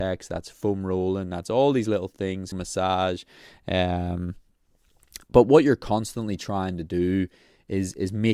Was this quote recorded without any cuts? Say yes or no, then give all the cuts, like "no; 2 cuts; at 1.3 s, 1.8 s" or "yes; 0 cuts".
no; 1 cut; at 2.5 s